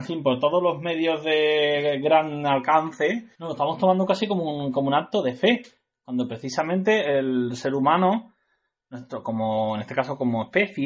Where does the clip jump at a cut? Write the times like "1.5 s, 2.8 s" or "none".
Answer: 3.3 s